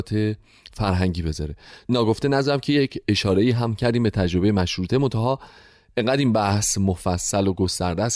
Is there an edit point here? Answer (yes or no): no